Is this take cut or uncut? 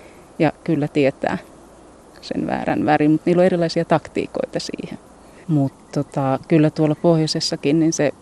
cut